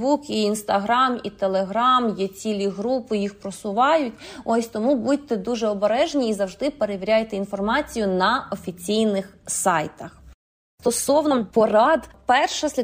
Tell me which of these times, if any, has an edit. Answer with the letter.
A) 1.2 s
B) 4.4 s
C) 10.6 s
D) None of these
D